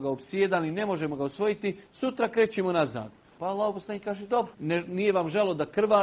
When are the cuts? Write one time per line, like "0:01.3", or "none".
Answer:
0:03.4
0:04.5